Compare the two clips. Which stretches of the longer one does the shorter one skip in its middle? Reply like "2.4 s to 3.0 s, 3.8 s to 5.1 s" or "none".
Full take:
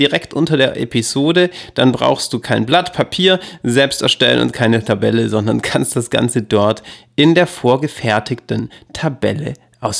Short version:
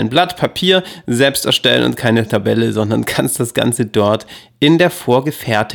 none